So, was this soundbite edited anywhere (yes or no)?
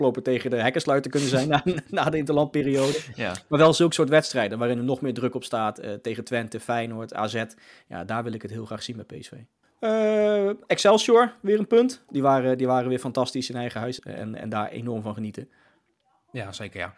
yes